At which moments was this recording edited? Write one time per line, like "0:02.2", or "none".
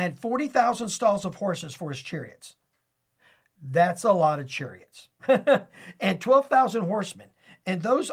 none

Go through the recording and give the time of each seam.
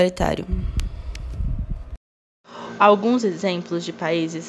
0:02.8

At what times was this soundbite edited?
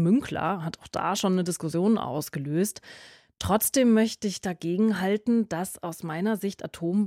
none

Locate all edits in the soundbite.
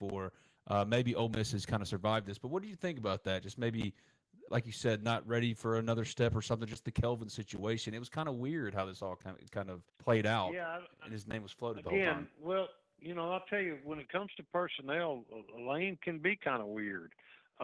0:04.5
0:09.9

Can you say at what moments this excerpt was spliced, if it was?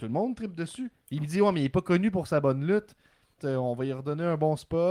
0:01.0
0:03.4

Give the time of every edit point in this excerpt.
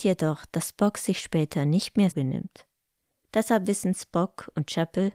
0:02.1

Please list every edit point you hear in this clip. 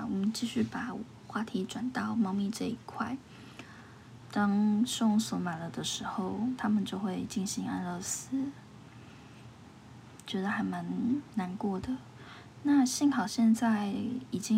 0:04.2

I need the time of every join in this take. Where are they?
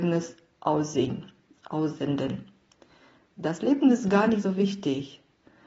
none

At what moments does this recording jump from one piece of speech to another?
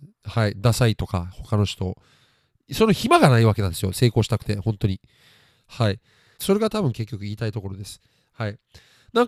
0:06.4

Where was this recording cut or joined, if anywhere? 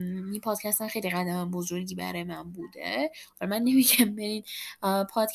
none

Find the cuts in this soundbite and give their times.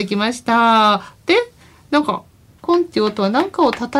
0:02.6

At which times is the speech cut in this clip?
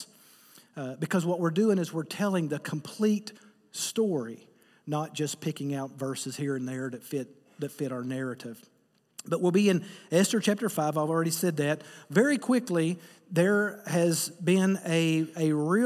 none

